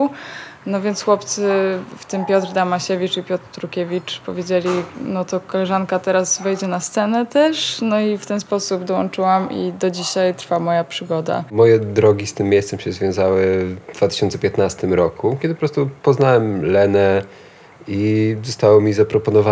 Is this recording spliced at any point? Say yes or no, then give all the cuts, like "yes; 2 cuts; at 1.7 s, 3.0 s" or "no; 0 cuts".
no; 0 cuts